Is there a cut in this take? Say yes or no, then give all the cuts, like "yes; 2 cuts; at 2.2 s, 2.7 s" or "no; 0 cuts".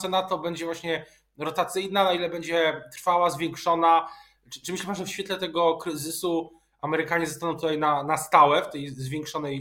no; 0 cuts